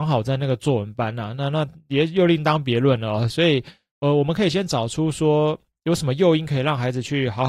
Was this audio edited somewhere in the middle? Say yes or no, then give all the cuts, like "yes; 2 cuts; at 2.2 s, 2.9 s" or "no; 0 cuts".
no; 0 cuts